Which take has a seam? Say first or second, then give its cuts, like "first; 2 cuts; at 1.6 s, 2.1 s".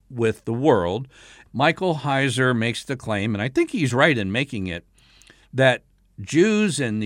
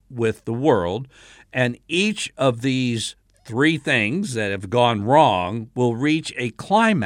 first; 1 cut; at 1.5 s